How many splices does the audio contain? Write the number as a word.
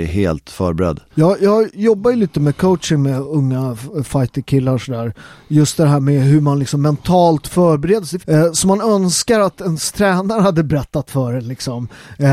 two